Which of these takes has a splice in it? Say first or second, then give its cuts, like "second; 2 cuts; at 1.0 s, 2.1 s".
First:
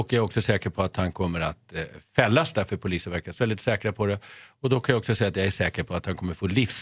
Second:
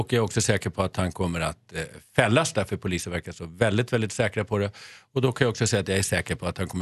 first; 1 cut; at 3.4 s